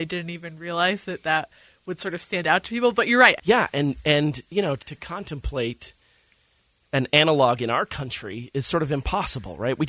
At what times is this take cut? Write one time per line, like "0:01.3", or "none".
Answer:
0:03.4
0:04.8